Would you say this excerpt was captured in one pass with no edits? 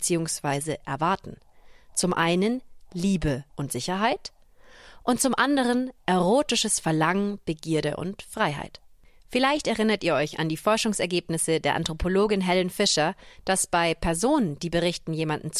no; 3 cuts; at 3.5 s, 9.2 s, 13.4 s

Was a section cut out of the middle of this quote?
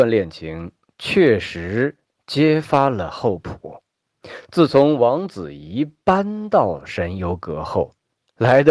no; 0 cuts

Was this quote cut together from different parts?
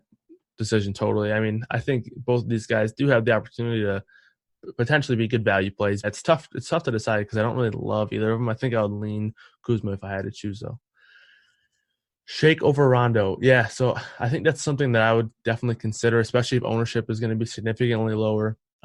yes; 1 cut; at 6.0 s

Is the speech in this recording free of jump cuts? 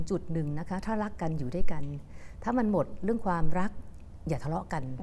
yes; 0 cuts

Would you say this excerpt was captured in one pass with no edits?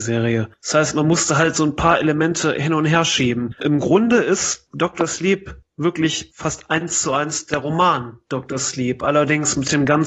yes; 0 cuts

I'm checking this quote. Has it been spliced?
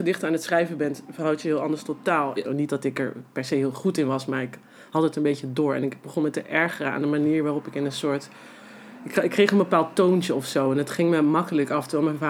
yes; 1 cut; at 2.4 s

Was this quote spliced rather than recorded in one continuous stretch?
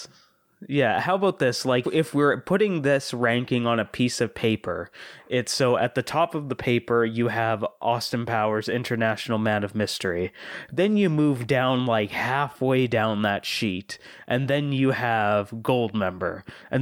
yes; 1 cut; at 1.8 s

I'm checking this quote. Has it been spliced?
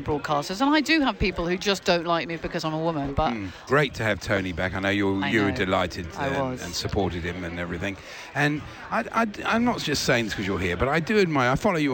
yes; 1 cut; at 3.7 s

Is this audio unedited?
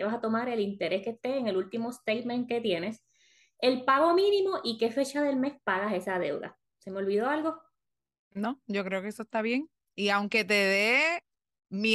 yes; 0 cuts

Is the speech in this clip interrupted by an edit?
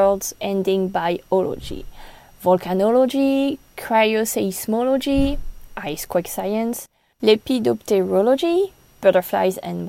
no; 0 cuts

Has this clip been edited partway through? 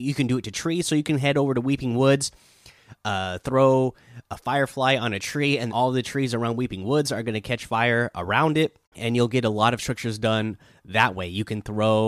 yes; 2 cuts; at 5.7 s, 8.8 s

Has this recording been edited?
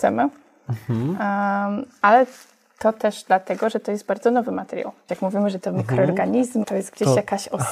yes; 2 cuts; at 5.1 s, 6.6 s

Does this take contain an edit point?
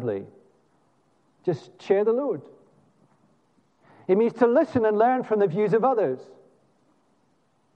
no; 0 cuts

